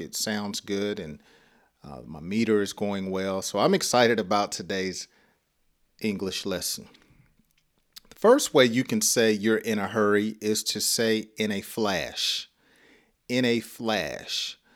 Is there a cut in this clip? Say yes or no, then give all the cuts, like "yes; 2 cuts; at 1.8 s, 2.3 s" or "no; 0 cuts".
no; 0 cuts